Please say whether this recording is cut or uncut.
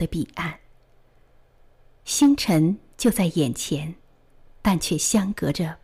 uncut